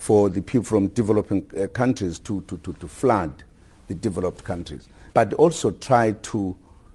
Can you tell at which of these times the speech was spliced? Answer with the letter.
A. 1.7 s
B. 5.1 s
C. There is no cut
B